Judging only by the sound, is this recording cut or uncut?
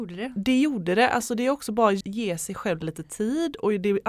cut